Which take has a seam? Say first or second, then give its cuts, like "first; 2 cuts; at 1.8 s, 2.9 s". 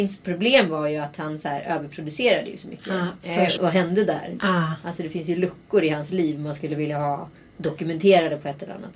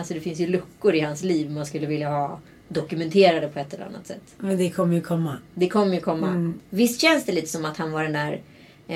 first; 1 cut; at 3.6 s